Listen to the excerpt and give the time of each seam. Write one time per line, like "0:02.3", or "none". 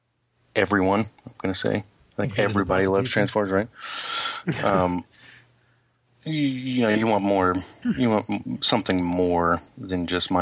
none